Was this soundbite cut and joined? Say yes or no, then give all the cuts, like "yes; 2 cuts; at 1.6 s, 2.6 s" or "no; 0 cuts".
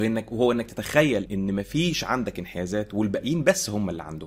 yes; 1 cut; at 1.3 s